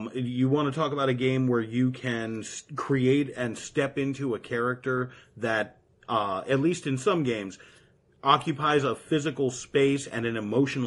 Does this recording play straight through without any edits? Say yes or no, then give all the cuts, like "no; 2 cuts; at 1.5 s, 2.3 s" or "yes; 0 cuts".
yes; 0 cuts